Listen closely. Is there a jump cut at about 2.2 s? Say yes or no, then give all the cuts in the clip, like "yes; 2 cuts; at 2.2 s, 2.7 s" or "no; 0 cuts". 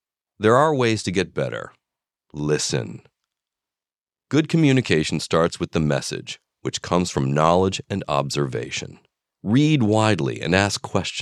yes; 2 cuts; at 2.2 s, 9.3 s